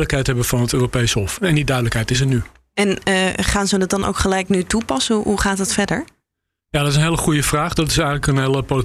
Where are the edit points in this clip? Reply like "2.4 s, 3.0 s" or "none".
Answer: none